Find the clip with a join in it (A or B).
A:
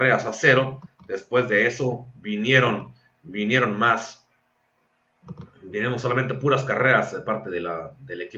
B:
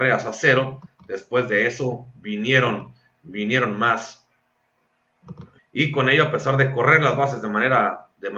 B